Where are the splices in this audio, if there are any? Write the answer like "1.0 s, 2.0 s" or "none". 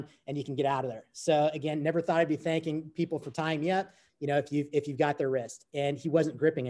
4.1 s